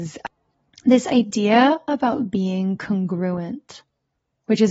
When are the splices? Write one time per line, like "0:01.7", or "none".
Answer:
none